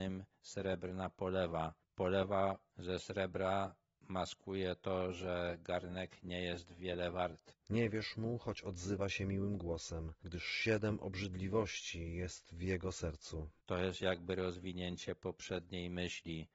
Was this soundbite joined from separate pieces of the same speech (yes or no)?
yes